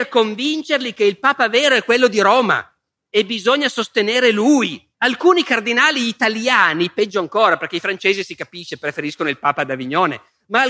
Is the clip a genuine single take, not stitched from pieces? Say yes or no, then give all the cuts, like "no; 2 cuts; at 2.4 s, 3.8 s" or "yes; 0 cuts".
no; 1 cut; at 4.9 s